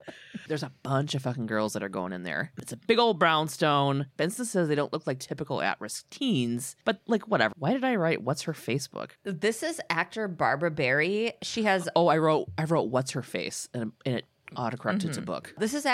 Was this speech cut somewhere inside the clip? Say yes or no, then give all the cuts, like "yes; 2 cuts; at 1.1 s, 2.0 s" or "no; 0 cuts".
yes; 1 cut; at 7.5 s